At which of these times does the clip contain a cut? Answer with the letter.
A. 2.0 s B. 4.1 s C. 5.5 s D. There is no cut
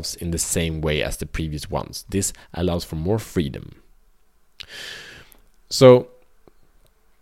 D